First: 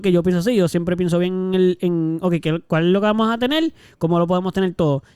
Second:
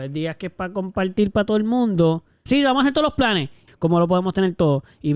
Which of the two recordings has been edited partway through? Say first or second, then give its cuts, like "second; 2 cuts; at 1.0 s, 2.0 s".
second; 2 cuts; at 2.5 s, 3.7 s